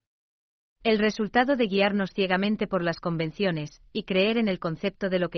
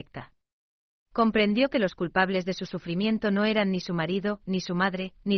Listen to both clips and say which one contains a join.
second; 2 cuts; at 0.9 s, 4.4 s

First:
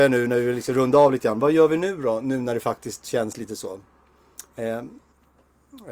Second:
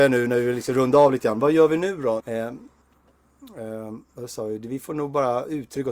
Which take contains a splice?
second; 2 cuts; at 2.2 s, 4.0 s

